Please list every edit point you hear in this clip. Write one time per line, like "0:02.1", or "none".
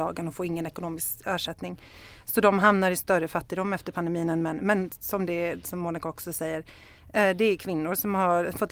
none